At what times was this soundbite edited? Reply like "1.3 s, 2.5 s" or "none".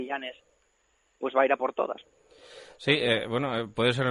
none